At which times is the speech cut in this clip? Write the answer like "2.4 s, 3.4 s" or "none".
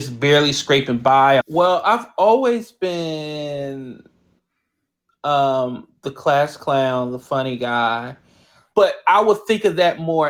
1.4 s, 8.7 s

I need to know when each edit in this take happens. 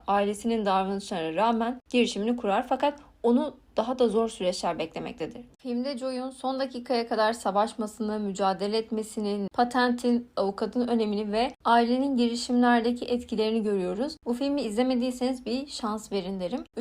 9.5 s

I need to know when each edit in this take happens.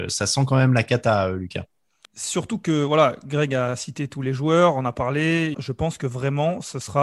2.0 s, 5.5 s

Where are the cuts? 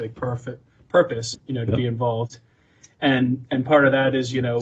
1.3 s

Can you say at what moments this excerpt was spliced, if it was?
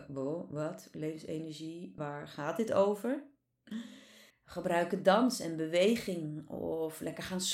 2.0 s, 4.3 s

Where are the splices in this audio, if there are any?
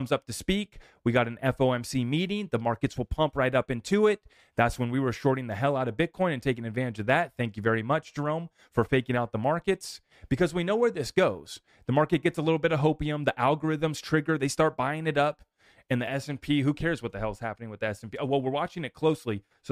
none

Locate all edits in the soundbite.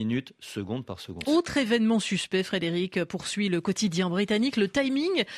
1.2 s

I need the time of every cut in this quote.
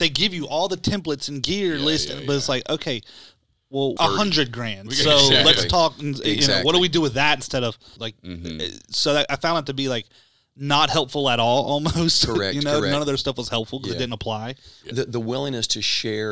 4.0 s, 8.0 s, 14.9 s

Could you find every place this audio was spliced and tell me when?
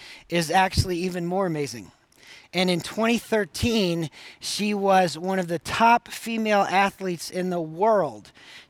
2.4 s

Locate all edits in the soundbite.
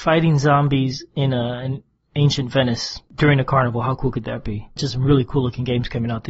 4.8 s

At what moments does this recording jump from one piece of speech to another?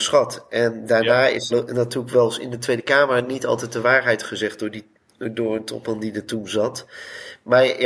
1.5 s

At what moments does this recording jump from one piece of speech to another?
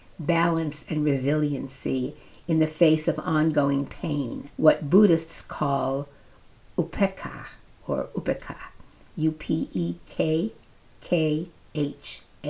4.5 s

